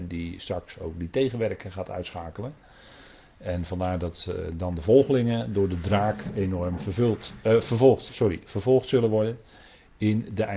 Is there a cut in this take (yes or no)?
no